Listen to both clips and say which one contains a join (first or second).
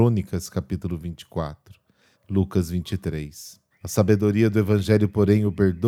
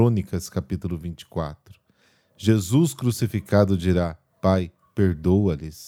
first